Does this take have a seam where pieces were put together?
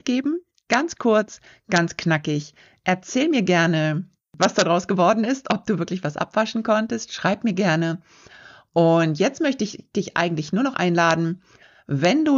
no; 0 cuts

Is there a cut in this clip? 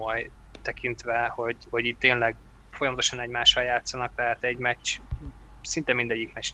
no; 0 cuts

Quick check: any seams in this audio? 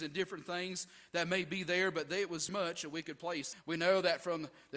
yes; 2 cuts; at 2.5 s, 3.5 s

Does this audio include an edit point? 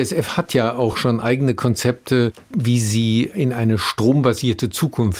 no; 0 cuts

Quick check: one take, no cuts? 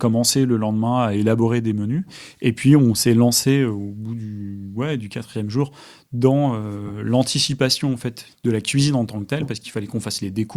yes; 0 cuts

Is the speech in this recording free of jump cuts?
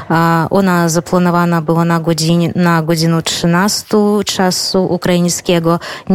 yes; 0 cuts

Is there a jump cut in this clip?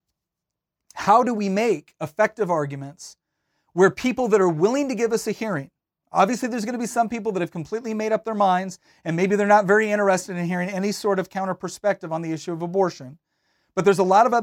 no; 0 cuts

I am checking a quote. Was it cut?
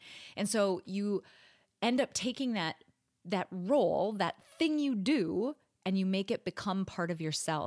no; 0 cuts

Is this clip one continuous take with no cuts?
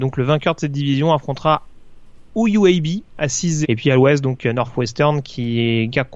no; 2 cuts; at 2.3 s, 3.6 s

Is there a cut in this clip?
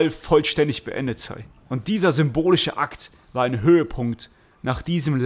no; 0 cuts

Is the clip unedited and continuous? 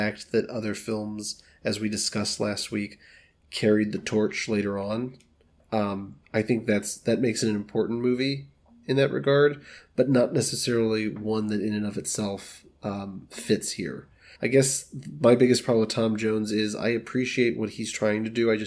no; 1 cut; at 14.4 s

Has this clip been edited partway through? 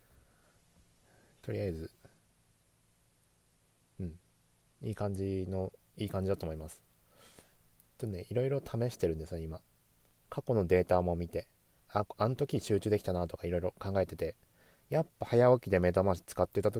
yes; 1 cut; at 11.8 s

